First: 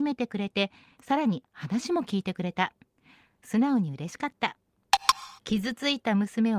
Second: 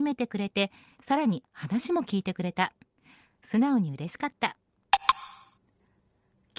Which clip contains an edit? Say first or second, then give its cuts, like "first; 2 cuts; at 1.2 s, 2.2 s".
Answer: first; 1 cut; at 5.4 s